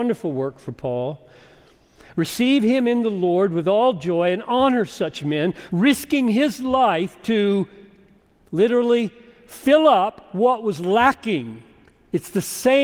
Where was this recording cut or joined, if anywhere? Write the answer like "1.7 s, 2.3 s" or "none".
5.7 s